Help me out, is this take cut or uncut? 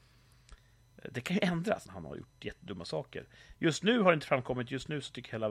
cut